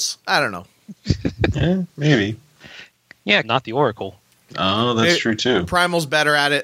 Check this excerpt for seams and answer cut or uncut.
cut